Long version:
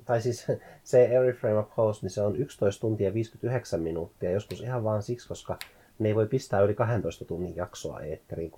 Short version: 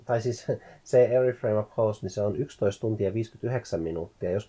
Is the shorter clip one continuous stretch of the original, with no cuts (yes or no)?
yes